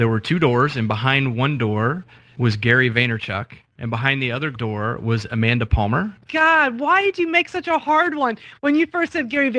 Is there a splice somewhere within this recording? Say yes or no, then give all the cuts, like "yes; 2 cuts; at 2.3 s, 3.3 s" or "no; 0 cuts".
yes; 1 cut; at 6.3 s